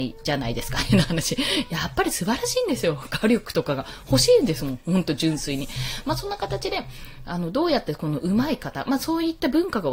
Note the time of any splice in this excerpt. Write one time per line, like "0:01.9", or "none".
none